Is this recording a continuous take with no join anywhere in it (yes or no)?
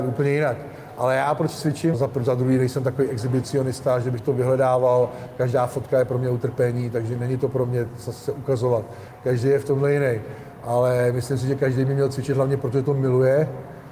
no